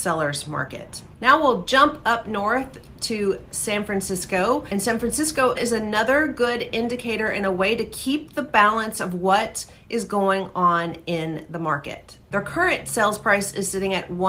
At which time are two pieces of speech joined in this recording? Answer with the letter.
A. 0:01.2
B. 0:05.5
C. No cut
B